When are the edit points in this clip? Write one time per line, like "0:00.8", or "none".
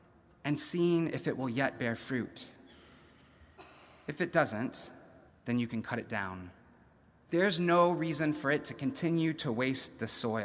0:05.3
0:07.3